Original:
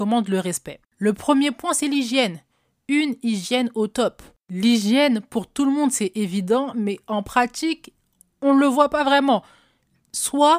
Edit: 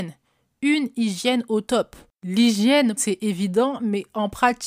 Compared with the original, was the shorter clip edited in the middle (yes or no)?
yes